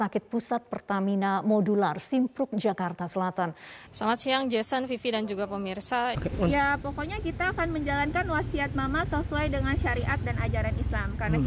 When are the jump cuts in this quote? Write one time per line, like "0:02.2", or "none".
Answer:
0:03.9
0:06.1